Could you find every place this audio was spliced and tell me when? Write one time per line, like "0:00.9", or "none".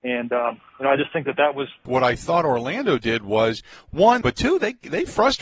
0:01.9
0:04.2

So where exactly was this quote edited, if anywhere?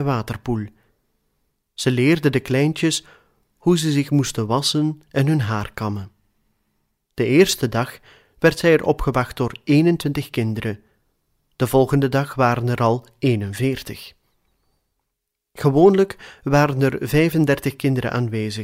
0:07.0

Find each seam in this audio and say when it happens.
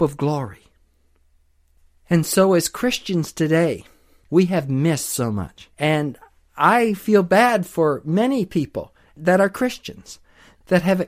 0:04.2
0:05.7

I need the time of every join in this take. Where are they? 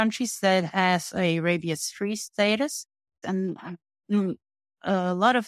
0:03.2

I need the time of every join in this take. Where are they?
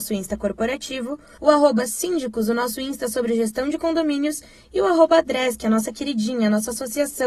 0:01.4

